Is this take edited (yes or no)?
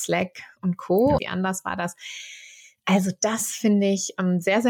yes